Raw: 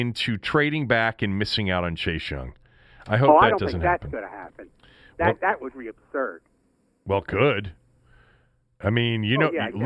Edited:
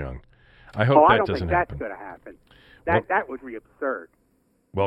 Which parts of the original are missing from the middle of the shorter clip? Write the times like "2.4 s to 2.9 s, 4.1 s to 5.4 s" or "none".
none